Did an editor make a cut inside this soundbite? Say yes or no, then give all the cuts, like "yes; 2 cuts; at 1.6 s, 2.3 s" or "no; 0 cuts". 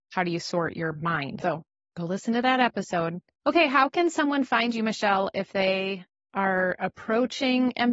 yes; 1 cut; at 1.4 s